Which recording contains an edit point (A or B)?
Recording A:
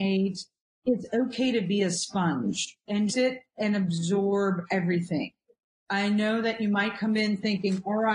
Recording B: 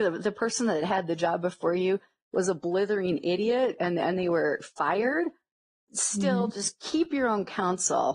A